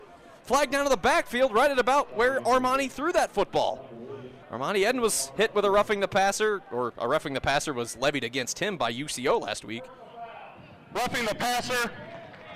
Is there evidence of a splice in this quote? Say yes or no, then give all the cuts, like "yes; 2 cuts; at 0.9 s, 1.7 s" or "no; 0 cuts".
yes; 1 cut; at 4.4 s